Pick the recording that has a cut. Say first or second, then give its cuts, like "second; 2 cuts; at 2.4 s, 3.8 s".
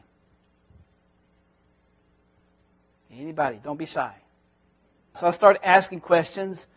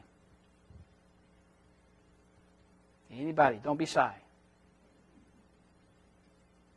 first; 1 cut; at 5.1 s